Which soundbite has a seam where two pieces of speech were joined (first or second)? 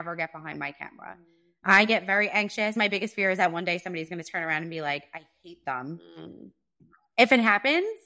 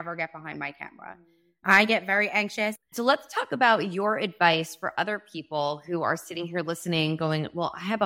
second